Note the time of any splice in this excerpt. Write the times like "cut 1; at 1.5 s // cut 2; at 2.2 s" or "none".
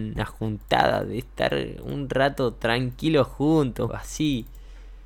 cut 1; at 3.9 s